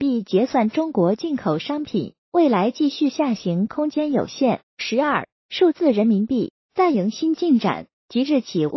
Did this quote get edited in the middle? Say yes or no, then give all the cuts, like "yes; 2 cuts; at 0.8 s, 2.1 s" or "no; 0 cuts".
yes; 2 cuts; at 2.2 s, 4.7 s